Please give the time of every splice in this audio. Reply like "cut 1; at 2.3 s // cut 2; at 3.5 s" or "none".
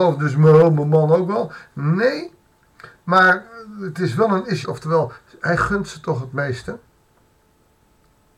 cut 1; at 4.6 s